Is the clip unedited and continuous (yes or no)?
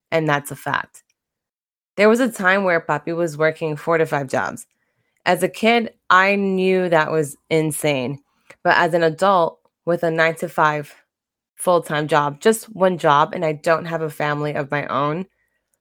yes